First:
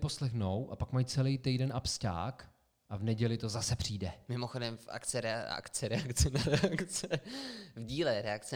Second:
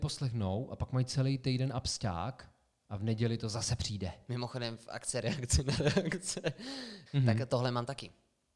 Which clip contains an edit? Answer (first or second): second